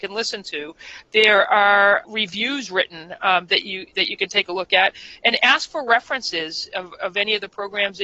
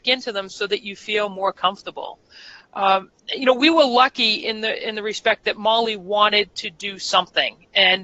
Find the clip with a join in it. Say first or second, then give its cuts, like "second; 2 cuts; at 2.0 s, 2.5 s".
first; 1 cut; at 2.0 s